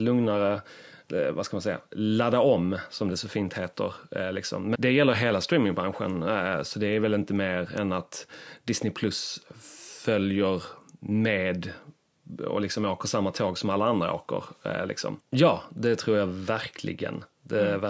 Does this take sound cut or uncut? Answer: cut